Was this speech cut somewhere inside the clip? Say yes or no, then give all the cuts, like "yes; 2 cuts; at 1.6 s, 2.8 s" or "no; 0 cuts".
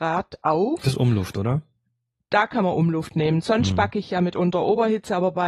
no; 0 cuts